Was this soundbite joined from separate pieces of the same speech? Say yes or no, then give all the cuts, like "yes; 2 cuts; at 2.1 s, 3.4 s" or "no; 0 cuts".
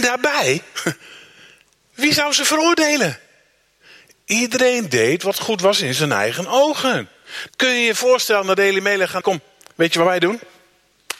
yes; 2 cuts; at 7.5 s, 9.2 s